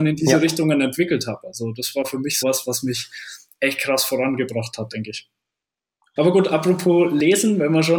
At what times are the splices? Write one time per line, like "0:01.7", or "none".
0:02.4
0:06.2